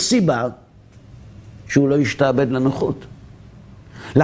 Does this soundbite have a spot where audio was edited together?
no; 0 cuts

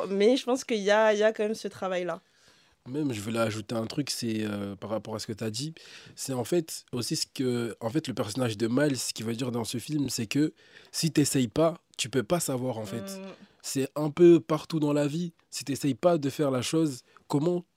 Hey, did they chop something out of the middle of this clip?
no; 0 cuts

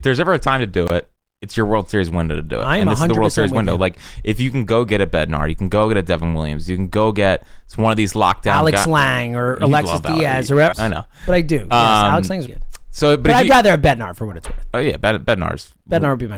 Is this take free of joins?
no; 2 cuts; at 10.7 s, 12.5 s

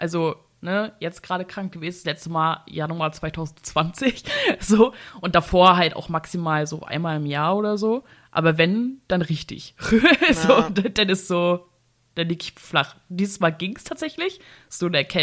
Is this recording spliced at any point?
no; 0 cuts

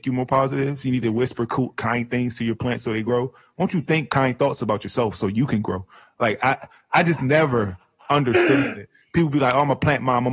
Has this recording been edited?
no; 0 cuts

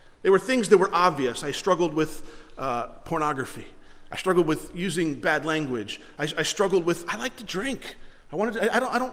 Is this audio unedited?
yes; 0 cuts

